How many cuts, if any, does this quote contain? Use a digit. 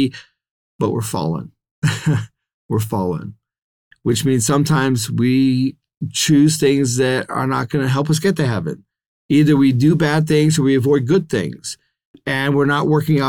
0